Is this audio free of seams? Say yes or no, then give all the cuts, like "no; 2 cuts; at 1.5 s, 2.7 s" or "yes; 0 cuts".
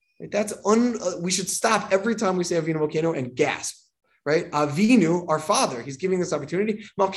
yes; 0 cuts